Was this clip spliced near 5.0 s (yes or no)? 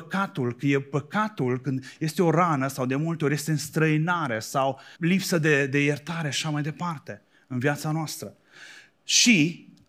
yes